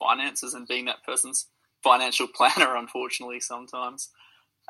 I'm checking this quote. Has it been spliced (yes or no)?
no